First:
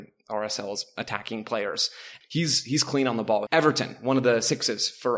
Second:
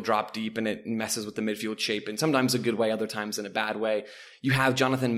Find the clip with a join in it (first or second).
first